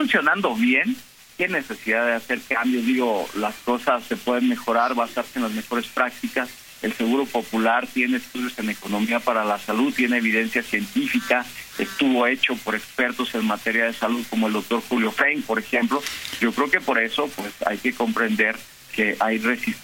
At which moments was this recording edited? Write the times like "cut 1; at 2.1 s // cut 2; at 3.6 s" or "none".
none

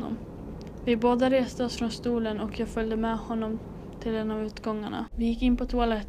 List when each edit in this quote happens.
cut 1; at 5.1 s

